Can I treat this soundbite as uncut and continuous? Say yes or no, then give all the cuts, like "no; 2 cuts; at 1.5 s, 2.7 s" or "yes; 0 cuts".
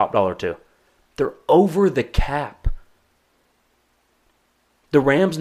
yes; 0 cuts